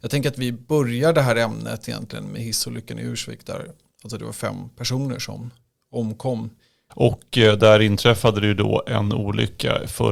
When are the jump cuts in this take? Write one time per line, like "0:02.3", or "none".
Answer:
0:06.9